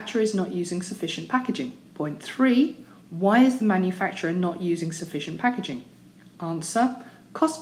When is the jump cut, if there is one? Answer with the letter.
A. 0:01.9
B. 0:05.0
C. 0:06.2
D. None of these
A